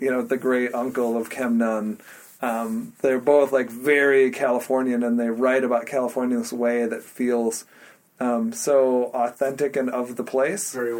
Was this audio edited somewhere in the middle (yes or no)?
no